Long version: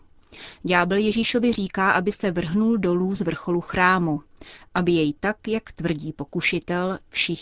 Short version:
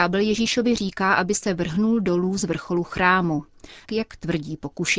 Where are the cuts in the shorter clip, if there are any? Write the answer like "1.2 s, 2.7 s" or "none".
3.8 s

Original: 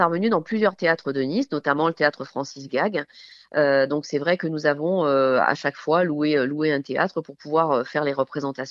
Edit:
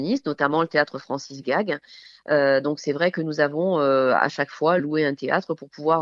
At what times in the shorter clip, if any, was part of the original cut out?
4.8 s

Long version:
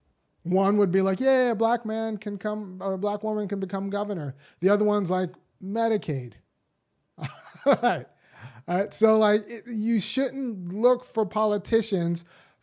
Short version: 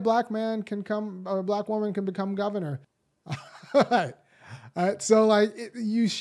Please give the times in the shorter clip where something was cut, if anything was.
2.8 s

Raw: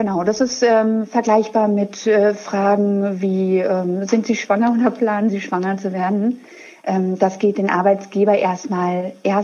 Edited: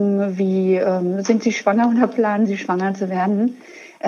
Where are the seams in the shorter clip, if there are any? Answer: none

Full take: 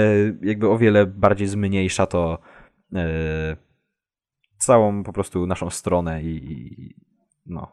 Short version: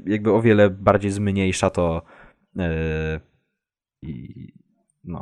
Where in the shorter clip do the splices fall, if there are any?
4.0 s

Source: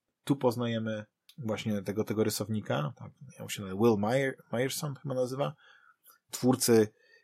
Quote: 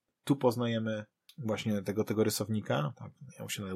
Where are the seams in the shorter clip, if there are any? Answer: none

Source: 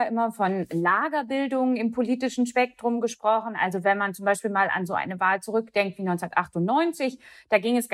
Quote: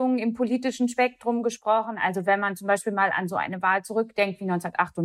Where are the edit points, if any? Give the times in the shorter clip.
none

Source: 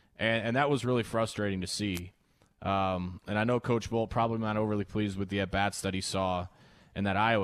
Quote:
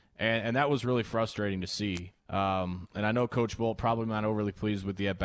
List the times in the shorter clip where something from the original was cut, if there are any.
2.2 s

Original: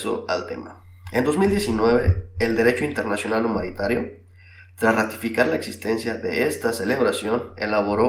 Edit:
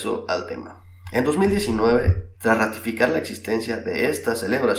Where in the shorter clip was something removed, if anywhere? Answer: 2.3 s

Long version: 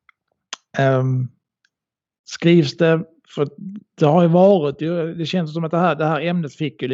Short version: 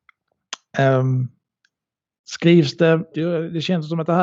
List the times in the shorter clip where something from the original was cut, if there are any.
3.1 s

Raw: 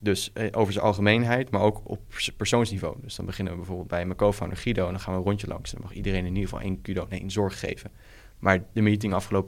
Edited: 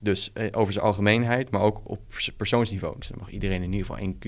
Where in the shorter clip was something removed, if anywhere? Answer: 3.0 s

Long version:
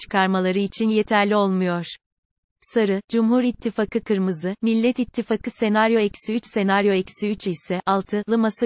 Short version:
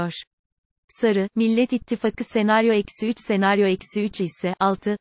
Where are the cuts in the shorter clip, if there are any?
1.3 s

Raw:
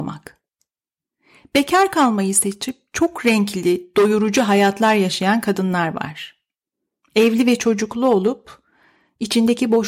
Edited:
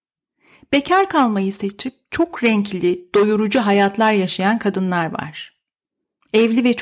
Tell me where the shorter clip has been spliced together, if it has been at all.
none

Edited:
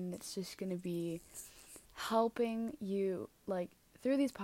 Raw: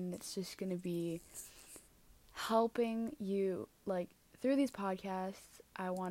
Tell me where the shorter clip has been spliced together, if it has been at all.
1.8 s

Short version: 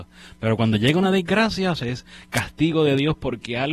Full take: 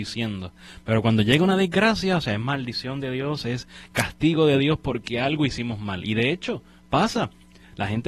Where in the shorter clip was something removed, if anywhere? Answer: 1.8 s

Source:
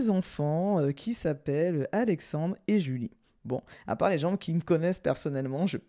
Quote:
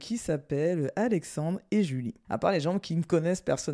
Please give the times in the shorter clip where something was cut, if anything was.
2.2 s

